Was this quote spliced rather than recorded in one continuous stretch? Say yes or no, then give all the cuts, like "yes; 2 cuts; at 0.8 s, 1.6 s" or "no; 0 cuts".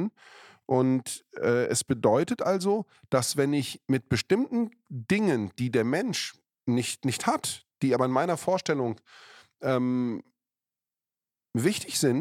no; 0 cuts